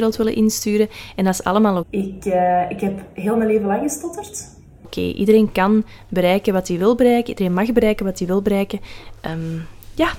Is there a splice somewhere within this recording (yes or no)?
yes